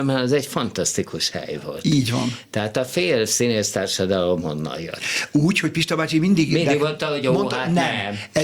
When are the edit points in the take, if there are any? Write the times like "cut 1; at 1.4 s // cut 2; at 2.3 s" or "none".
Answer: none